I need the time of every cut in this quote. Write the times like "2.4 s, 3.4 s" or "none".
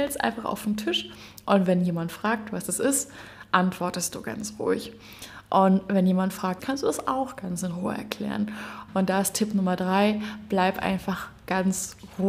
6.6 s, 8.9 s